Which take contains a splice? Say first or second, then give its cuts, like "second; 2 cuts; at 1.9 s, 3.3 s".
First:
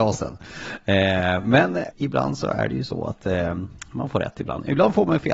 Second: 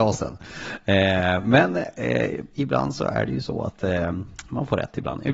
first; 1 cut; at 1.9 s